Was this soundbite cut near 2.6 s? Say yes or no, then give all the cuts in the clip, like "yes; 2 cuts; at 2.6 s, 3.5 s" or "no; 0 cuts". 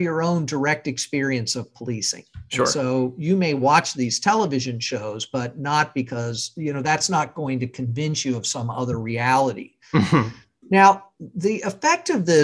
no; 1 cut; at 10.6 s